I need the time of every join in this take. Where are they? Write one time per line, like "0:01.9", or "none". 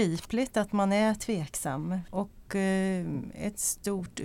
0:02.1